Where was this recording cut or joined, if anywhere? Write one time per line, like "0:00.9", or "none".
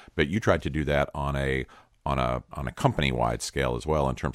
0:02.5